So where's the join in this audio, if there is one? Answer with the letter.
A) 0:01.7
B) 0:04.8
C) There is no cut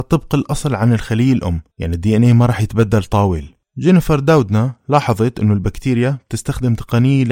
A